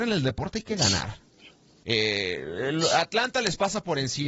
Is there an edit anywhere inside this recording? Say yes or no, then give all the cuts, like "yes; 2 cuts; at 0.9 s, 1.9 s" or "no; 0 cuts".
yes; 1 cut; at 1.8 s